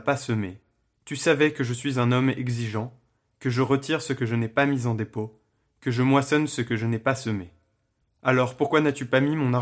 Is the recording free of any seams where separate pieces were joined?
no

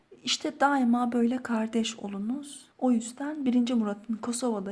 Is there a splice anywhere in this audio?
yes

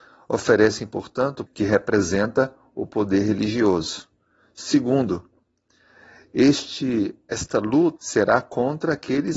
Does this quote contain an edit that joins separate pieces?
yes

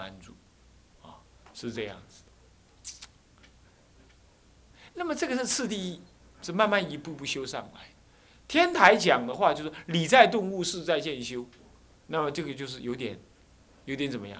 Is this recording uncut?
yes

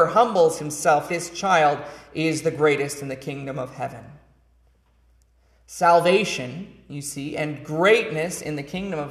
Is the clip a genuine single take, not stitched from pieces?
no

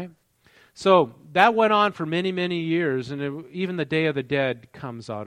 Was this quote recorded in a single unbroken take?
yes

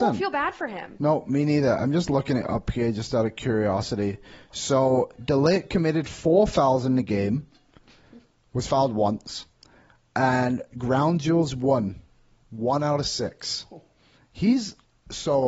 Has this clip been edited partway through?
no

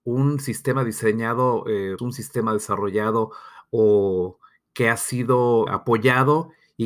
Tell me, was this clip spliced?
yes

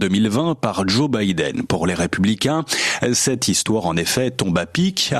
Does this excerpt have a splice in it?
no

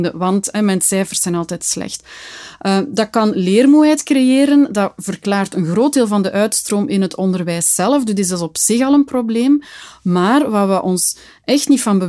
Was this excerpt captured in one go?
yes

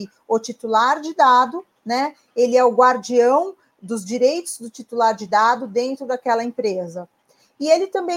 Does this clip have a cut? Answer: no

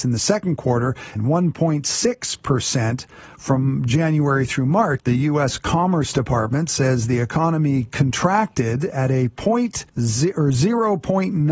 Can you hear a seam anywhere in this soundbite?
yes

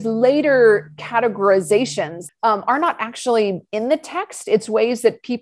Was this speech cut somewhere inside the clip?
yes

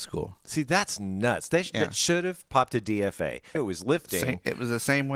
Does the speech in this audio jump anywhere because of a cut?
yes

